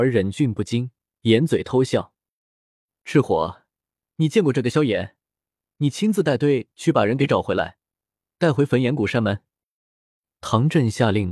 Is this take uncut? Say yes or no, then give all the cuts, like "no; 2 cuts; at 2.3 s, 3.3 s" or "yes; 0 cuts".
yes; 0 cuts